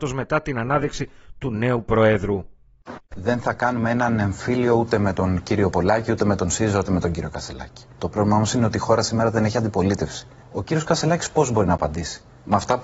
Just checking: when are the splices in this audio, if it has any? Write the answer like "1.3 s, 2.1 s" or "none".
3.0 s, 8.0 s